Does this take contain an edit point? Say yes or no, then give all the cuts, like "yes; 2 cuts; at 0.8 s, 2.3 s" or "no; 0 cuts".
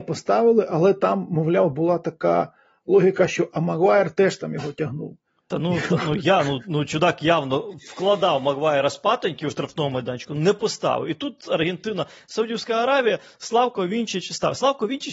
no; 0 cuts